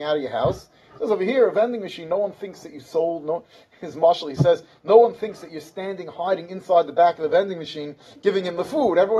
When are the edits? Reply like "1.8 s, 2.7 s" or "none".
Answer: none